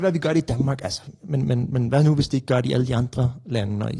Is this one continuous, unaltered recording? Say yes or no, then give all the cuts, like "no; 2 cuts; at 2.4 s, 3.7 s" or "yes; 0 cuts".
yes; 0 cuts